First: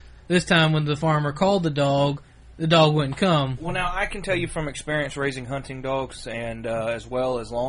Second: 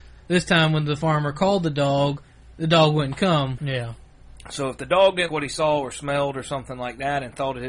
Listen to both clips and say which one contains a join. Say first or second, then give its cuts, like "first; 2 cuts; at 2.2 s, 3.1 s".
second; 2 cuts; at 3.6 s, 5.3 s